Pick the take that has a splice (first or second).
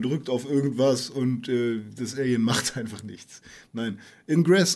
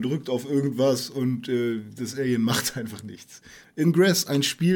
second